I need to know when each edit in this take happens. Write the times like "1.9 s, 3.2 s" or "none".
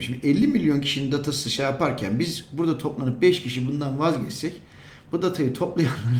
none